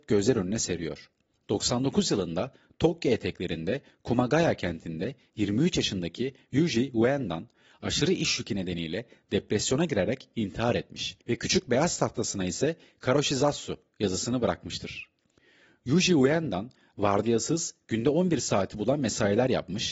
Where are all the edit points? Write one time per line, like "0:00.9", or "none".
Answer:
0:11.2

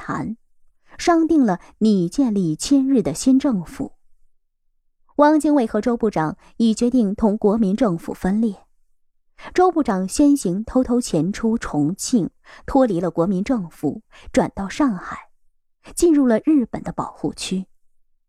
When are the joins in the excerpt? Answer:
none

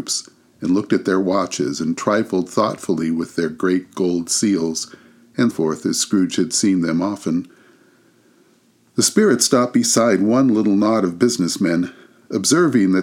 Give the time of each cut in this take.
0:05.5

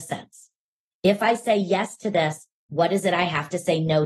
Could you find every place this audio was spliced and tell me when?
none

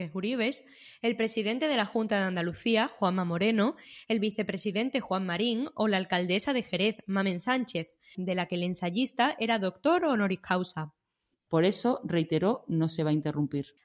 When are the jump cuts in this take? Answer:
0:08.1
0:11.5

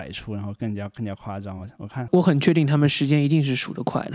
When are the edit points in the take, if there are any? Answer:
none

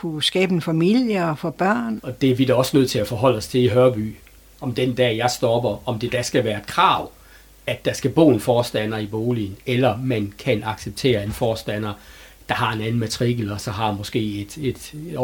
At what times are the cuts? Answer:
0:02.0

